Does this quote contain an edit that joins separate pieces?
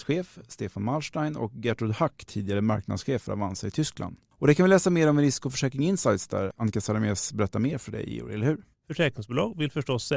yes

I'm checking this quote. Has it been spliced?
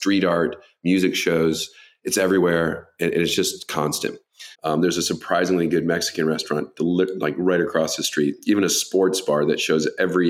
yes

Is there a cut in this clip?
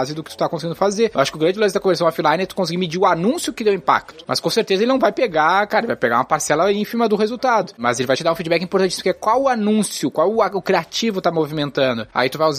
no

